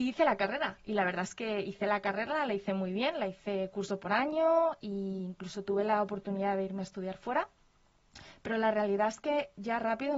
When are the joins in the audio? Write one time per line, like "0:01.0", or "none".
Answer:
none